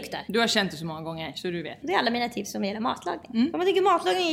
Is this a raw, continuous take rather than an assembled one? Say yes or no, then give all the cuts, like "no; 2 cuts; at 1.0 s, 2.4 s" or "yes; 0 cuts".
no; 1 cut; at 1.8 s